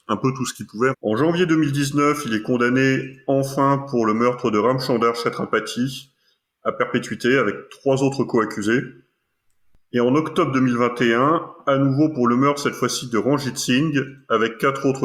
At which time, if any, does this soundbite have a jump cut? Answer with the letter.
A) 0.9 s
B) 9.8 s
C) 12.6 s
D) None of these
A